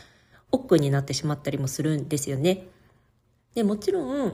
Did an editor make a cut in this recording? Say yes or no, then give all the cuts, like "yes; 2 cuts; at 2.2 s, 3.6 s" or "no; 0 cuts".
no; 0 cuts